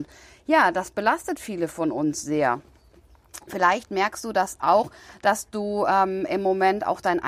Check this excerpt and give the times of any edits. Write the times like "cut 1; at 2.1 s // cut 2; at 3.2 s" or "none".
none